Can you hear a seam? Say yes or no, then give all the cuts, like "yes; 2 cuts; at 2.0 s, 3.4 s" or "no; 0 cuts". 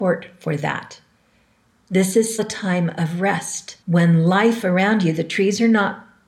yes; 2 cuts; at 2.4 s, 3.8 s